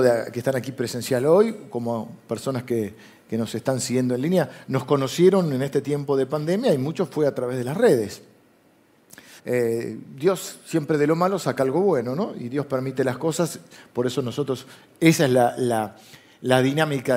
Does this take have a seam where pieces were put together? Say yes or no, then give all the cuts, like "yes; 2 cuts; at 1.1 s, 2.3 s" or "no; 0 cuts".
yes; 1 cut; at 9.4 s